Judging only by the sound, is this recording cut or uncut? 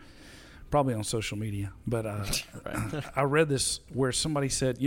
uncut